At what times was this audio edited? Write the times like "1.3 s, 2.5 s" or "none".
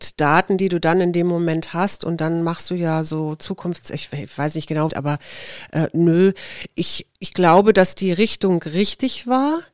4.9 s